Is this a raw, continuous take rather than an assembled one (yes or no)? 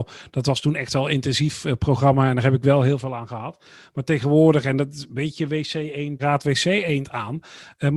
no